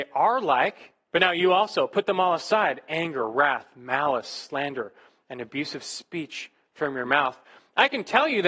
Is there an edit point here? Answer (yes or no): yes